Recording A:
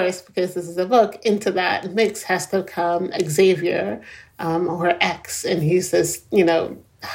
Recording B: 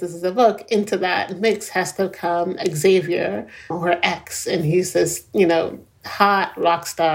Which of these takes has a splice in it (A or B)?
B